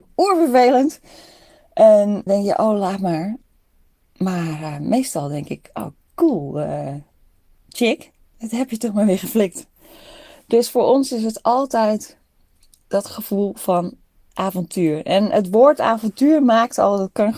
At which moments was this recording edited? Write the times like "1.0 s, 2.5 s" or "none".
2.3 s